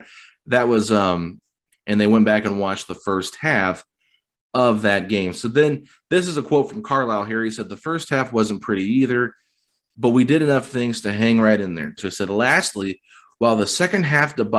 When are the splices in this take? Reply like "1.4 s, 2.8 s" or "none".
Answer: 1.7 s, 12.0 s

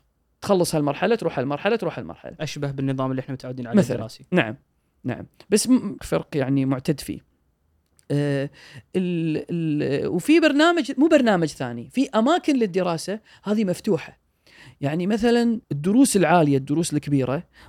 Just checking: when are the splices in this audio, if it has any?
6.0 s, 15.6 s

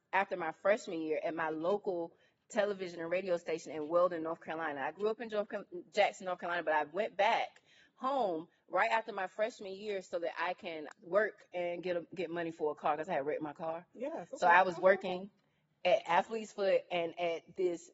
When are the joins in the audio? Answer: 10.9 s

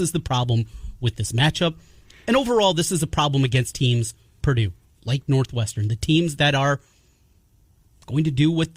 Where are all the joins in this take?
4.4 s

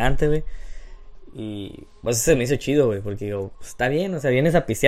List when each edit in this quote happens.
none

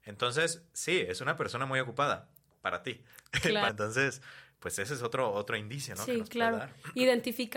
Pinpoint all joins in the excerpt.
3.7 s

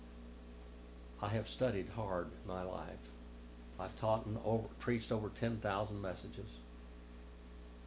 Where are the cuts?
3.7 s, 4.8 s

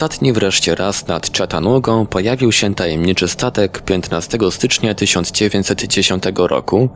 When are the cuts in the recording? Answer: none

